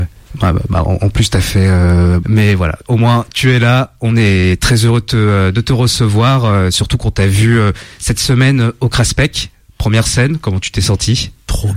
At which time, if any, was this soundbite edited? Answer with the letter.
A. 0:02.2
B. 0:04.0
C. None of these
A